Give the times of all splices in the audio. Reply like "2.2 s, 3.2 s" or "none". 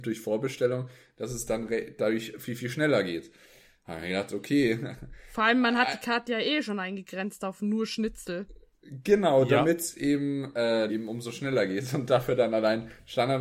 10.9 s